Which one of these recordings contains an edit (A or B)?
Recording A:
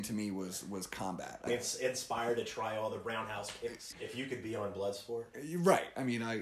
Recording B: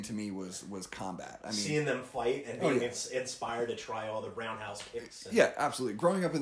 A